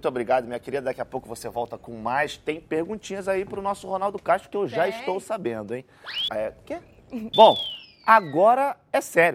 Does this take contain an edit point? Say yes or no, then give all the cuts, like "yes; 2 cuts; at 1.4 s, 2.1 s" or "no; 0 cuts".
yes; 2 cuts; at 6.3 s, 7.3 s